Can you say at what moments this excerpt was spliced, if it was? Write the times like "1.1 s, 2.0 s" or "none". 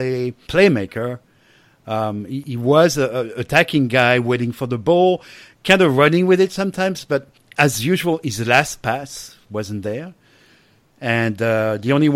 none